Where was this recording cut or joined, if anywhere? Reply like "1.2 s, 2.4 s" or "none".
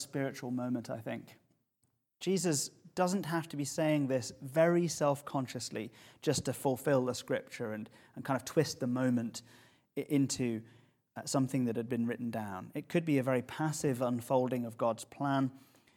2.1 s

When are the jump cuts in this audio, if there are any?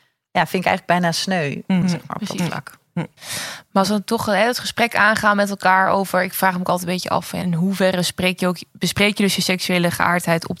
1.8 s, 7.4 s

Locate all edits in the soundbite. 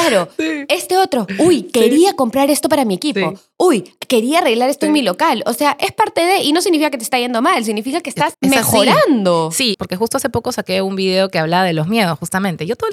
8.3 s, 9.7 s

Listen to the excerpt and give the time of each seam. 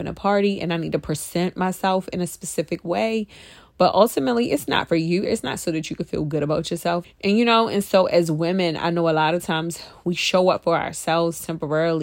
5.3 s, 7.0 s

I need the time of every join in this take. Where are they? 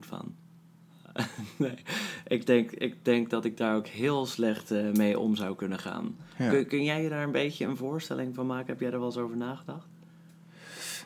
none

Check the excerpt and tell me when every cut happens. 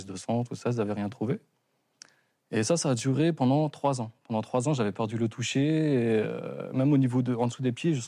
none

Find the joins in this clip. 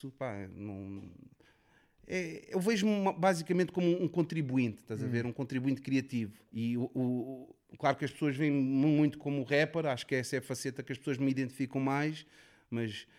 6.5 s, 9.2 s

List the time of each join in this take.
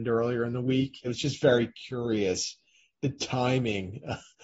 1.0 s

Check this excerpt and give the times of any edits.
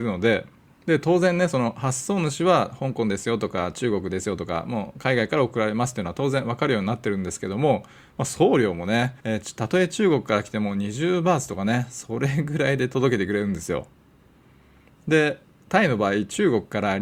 9.2 s

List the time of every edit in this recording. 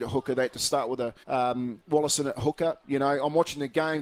1.2 s, 2.8 s

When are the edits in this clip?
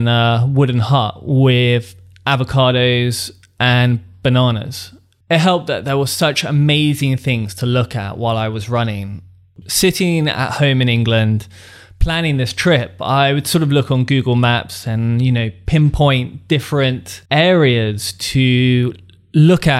5.2 s, 9.6 s, 17.3 s

